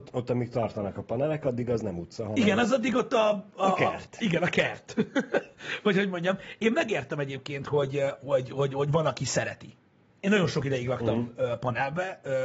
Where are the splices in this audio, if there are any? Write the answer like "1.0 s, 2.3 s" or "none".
10.1 s